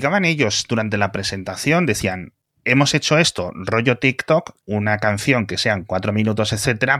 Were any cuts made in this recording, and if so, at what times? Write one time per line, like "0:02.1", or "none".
0:04.6